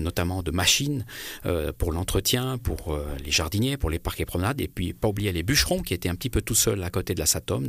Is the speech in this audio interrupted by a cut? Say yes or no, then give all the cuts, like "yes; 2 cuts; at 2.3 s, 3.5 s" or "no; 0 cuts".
yes; 1 cut; at 2.6 s